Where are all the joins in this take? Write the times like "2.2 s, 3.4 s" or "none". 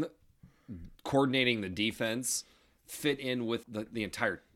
3.6 s